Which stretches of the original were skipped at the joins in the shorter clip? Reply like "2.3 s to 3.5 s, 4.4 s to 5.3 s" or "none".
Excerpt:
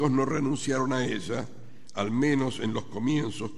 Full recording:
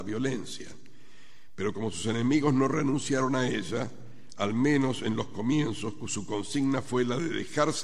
none

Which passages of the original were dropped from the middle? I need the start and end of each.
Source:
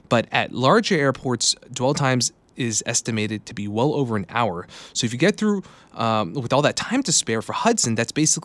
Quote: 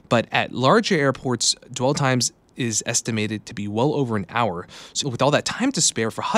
5.0 s to 6.3 s

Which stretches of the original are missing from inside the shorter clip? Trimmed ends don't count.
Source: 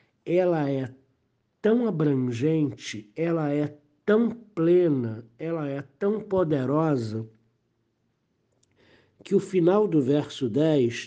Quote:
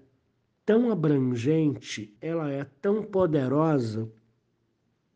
3.1 s to 5.3 s

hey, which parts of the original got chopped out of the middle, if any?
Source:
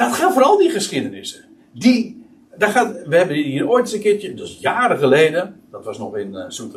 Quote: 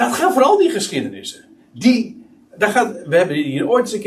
none

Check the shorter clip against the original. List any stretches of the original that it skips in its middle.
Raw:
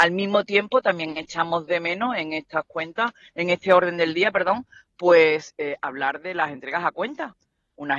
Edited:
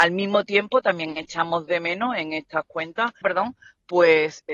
3.2 s to 4.3 s

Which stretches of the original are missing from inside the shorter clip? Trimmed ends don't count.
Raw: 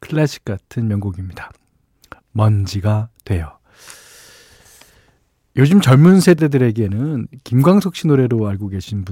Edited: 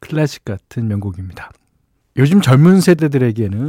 2.0 s to 5.4 s

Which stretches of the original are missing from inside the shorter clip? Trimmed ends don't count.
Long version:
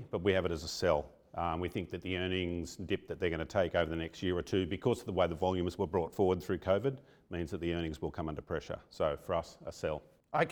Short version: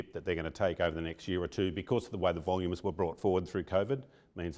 none

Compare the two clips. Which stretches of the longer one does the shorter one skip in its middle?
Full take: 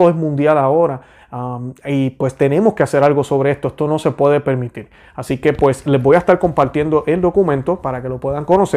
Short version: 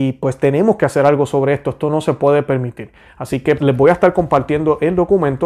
5.6 s to 5.8 s

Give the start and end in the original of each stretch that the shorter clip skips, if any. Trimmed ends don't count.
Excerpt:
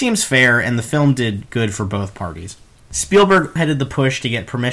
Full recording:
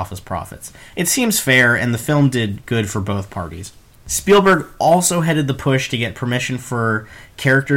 4.7 s to 5.2 s

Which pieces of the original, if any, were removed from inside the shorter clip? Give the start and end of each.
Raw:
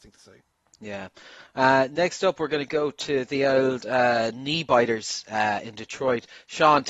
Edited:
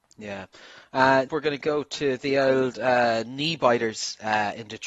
1.9 s to 2.3 s

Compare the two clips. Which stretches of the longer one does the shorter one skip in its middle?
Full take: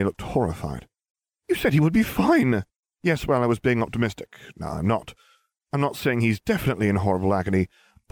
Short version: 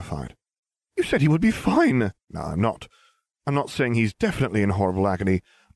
2.8 s to 4.5 s

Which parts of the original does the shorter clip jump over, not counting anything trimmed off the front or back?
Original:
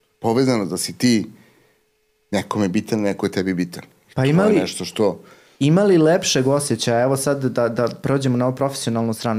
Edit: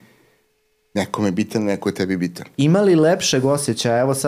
3.9 s to 5.6 s

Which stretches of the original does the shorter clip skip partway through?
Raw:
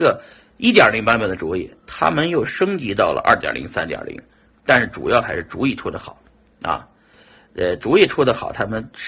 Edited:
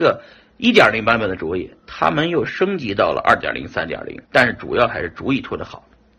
4.2 s to 4.6 s

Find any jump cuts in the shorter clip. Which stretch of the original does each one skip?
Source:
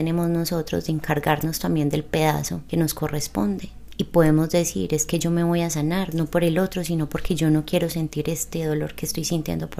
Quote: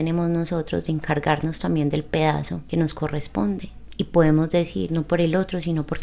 4.9 s to 6.1 s

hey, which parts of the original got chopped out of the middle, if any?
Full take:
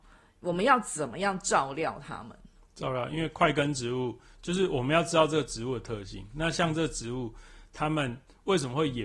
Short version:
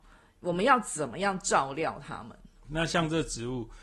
2.6 s to 6.3 s

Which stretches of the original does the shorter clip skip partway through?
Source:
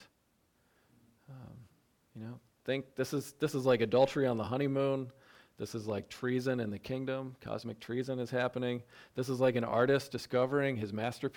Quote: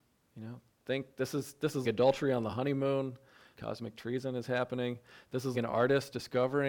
3.6 s to 3.8 s, 5.5 s to 7.4 s, 9.4 s to 9.5 s

